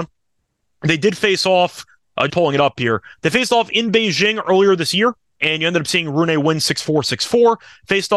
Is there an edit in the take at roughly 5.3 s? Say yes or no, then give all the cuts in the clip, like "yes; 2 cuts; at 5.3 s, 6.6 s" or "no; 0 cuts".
no; 1 cut; at 2.3 s